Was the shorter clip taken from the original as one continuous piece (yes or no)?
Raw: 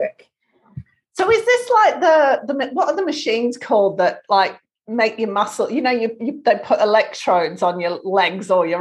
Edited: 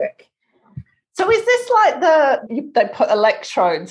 no